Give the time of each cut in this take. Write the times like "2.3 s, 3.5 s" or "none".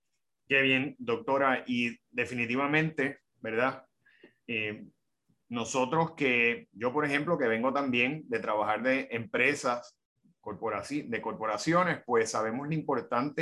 0.9 s

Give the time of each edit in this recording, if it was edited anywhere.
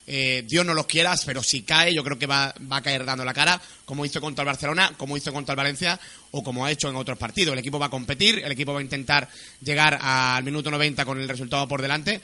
none

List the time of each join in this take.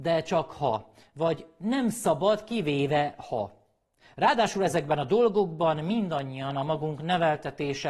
none

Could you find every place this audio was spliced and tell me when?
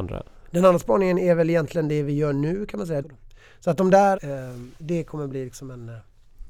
3.0 s, 4.2 s

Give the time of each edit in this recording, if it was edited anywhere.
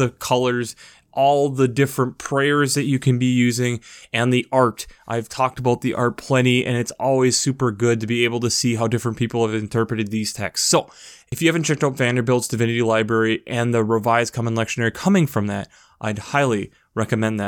none

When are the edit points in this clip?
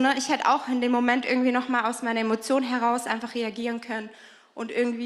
none

